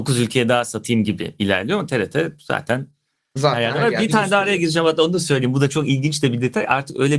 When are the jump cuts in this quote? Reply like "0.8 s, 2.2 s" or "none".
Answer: none